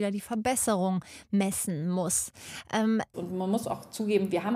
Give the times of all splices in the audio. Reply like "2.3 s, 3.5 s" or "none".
3.1 s